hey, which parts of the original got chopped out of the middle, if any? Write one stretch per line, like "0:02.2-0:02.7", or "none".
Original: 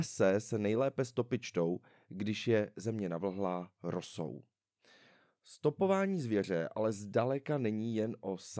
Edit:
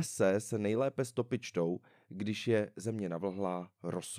none

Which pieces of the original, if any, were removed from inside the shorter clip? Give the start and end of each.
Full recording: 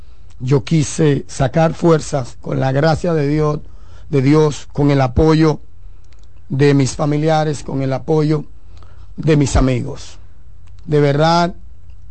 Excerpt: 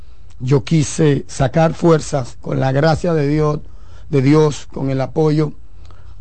0:04.7-0:07.6

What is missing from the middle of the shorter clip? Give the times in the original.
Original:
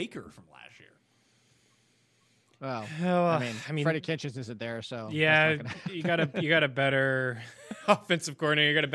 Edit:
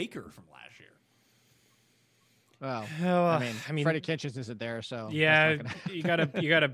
none

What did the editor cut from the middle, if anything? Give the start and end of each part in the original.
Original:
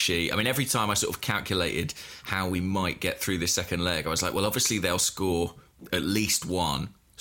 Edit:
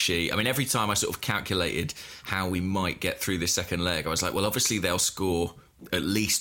none

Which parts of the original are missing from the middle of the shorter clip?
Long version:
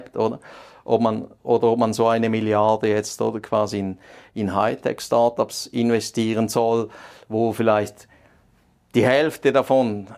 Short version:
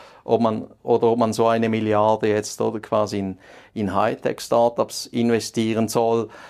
none

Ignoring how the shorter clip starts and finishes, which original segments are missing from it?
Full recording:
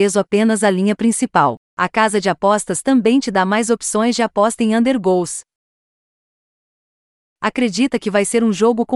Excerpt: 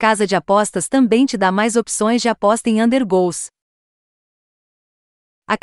none

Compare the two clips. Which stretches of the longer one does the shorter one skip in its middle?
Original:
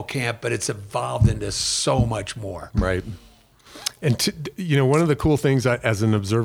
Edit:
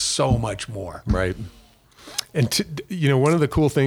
none

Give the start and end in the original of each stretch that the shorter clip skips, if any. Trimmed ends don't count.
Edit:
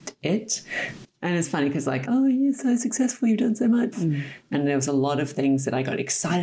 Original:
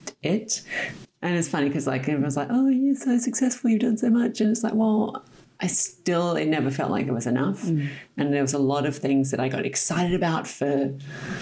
0:02.0-0:02.5
0:04.3-0:07.6

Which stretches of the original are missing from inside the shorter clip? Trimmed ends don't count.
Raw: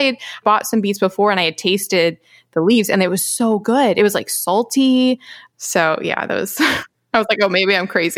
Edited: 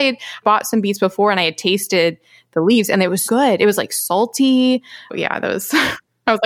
0:03.3-0:03.6
0:05.5-0:06.0

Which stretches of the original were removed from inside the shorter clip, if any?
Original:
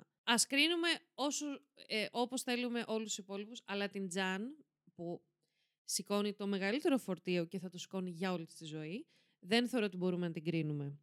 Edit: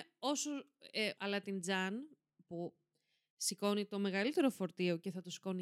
0:02.1-0:03.6

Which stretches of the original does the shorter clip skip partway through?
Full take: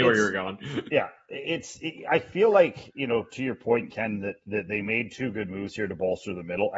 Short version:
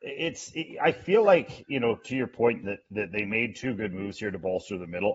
0:03.9-0:04.2

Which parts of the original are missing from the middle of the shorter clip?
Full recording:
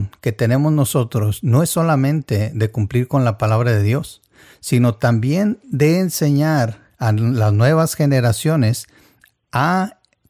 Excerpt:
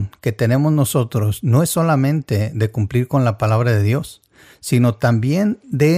none

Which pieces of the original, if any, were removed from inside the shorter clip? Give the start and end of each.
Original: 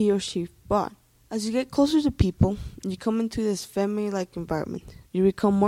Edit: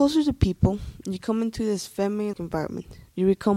0:04.1-0:04.3

